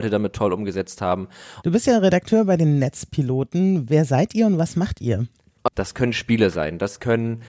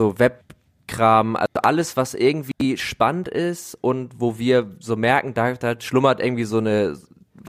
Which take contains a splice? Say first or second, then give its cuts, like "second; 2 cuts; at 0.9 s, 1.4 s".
first; 2 cuts; at 1.6 s, 5.7 s